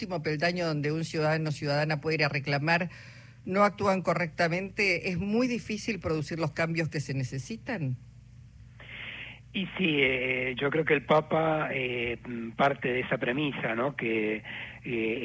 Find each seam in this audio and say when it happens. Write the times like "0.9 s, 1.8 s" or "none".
none